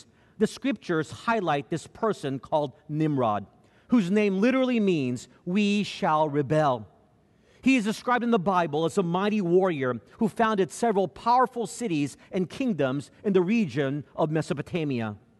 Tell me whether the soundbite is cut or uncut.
uncut